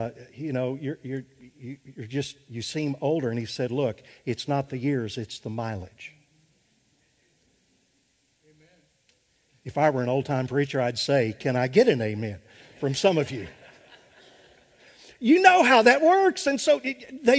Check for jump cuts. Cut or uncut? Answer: uncut